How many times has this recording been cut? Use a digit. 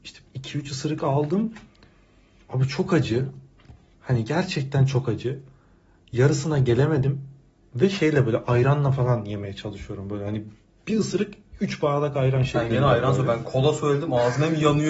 0